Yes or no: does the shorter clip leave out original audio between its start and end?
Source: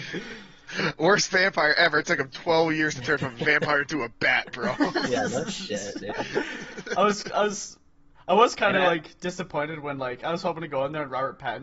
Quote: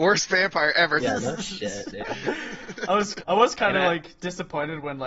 yes